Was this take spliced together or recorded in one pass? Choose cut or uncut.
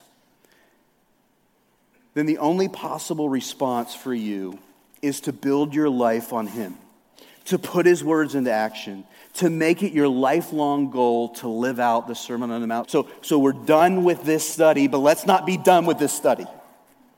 cut